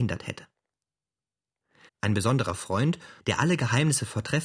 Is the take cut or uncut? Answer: cut